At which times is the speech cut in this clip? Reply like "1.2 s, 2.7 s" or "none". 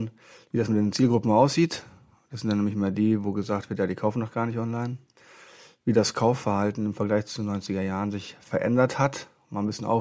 none